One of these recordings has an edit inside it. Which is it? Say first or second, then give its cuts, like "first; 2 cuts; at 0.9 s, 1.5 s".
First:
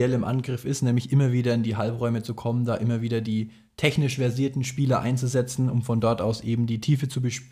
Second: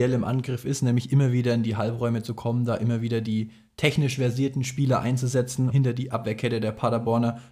second; 1 cut; at 5.7 s